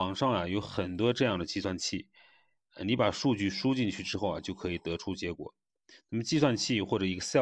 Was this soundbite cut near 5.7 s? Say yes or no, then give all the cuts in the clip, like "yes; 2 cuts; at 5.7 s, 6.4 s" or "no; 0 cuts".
no; 0 cuts